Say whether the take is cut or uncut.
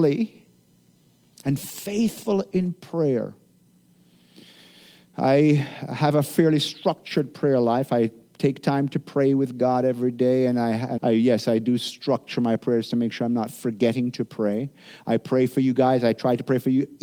cut